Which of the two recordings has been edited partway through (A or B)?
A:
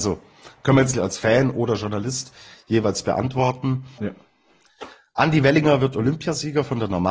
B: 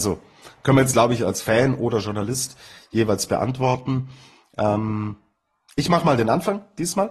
A